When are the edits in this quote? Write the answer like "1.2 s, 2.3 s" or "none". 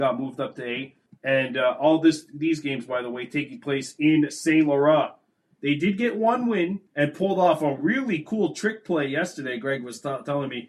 1.1 s, 5.6 s, 6.9 s

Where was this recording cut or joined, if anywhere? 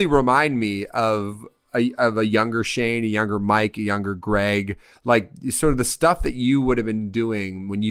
none

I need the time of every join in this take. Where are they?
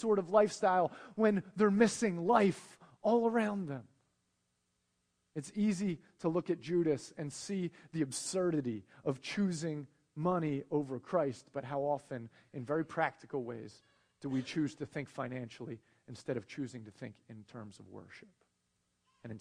none

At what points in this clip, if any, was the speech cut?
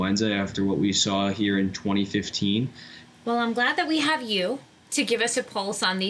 3.0 s

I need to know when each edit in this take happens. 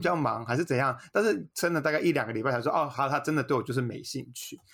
none

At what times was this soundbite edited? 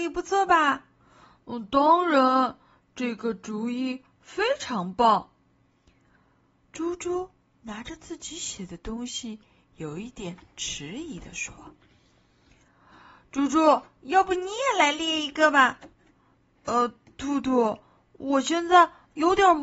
none

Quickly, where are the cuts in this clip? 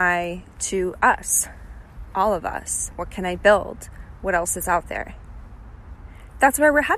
none

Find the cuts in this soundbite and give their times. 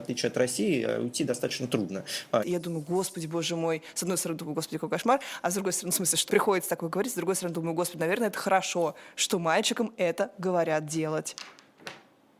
2.4 s, 6.3 s

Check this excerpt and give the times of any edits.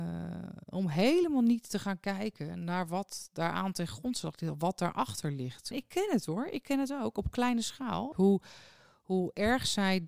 5.7 s, 8.1 s

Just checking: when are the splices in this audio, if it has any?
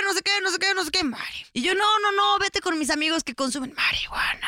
1.4 s

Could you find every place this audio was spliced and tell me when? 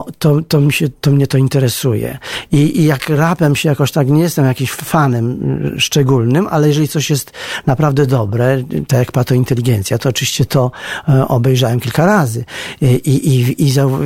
none

